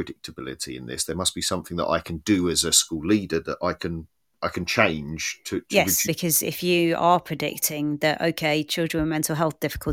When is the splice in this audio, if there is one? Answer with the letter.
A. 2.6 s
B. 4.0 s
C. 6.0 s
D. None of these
C